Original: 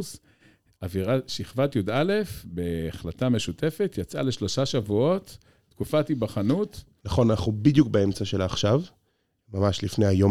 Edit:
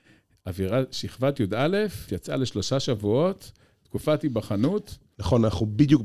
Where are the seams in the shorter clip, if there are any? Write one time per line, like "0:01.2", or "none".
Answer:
0:02.1